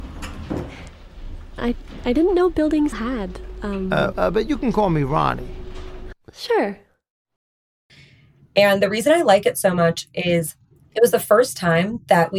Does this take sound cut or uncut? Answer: cut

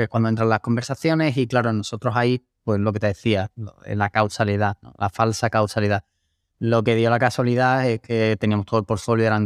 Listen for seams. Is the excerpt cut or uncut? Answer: uncut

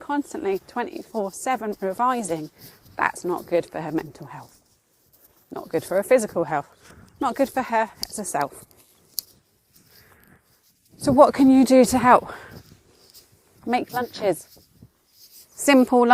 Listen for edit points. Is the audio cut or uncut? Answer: uncut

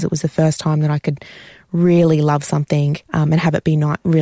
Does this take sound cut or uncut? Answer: cut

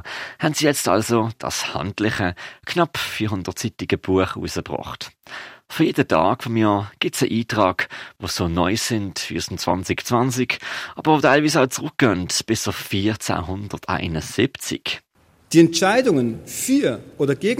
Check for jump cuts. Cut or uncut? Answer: uncut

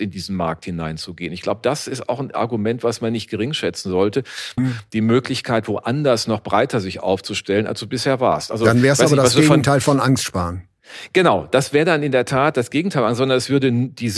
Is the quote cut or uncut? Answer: cut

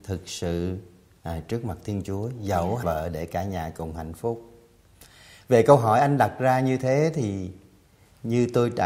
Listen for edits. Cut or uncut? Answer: cut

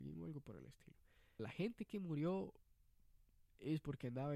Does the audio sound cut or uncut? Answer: cut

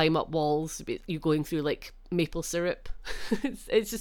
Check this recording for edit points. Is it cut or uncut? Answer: uncut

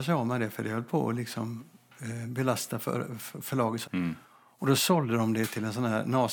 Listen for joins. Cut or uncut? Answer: cut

